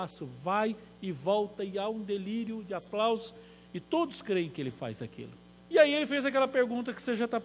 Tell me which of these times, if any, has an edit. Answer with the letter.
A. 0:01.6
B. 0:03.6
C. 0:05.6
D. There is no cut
C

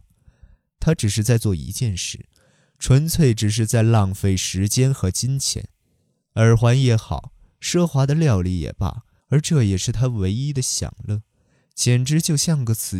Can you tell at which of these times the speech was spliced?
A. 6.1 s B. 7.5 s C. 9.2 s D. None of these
C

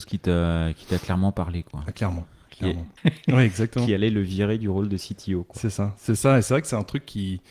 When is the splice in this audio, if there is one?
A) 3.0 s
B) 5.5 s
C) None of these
A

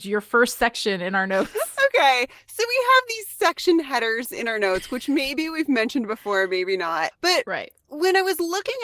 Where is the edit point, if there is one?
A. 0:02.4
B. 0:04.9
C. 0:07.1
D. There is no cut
C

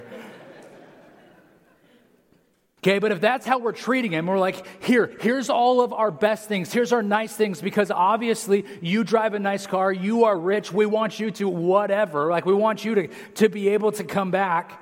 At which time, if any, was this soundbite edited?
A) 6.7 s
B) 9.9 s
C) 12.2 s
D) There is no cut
D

